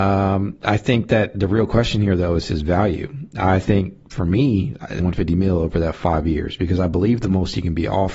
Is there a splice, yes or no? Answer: yes